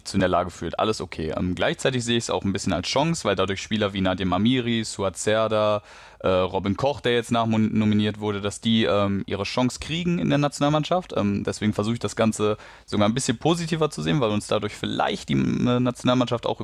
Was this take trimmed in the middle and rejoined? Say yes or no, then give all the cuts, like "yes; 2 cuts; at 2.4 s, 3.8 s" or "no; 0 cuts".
no; 0 cuts